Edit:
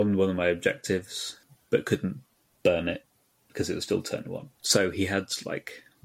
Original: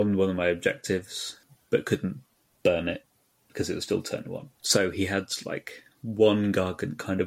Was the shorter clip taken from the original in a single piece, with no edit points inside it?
yes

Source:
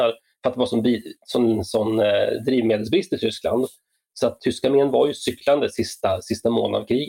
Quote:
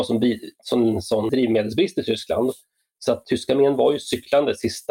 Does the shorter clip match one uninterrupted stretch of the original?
no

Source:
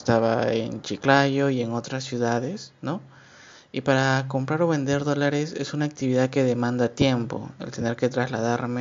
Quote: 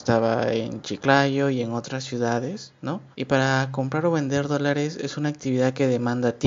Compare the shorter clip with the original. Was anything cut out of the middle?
yes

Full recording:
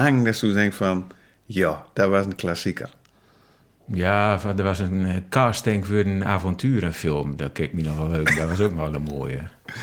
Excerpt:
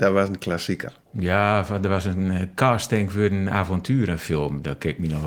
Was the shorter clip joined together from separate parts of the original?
yes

